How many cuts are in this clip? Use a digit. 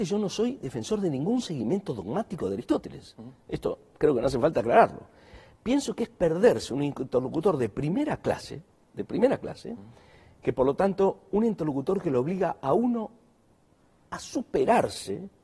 0